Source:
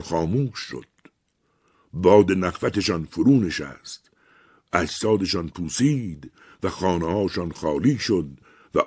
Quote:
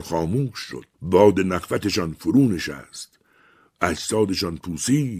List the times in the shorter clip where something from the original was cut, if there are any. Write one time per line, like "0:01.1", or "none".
0:00.9